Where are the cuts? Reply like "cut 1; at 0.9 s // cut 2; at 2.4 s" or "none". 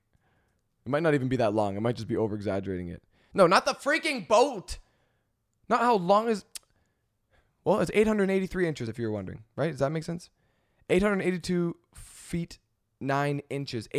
none